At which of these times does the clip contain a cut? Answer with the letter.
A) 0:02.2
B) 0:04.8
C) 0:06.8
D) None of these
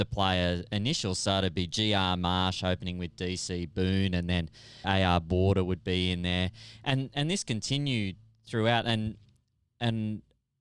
B